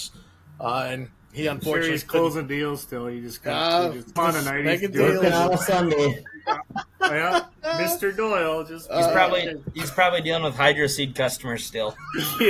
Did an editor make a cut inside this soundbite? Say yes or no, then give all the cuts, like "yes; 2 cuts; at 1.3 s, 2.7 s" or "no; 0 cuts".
yes; 1 cut; at 4.2 s